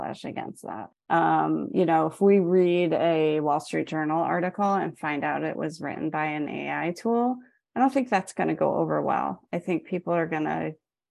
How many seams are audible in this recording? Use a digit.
1